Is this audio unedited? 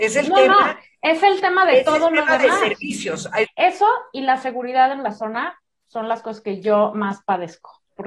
no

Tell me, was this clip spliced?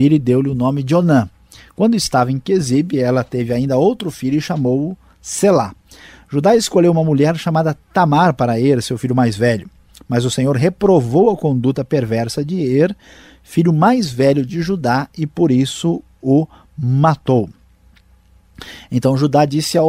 no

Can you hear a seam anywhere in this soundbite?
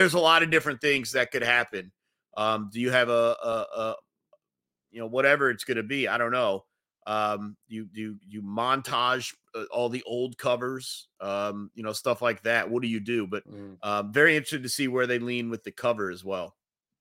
no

